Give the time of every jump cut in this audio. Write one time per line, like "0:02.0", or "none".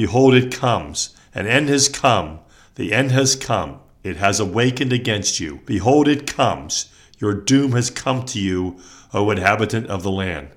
none